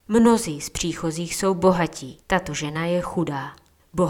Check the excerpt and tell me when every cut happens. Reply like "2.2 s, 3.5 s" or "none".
2.2 s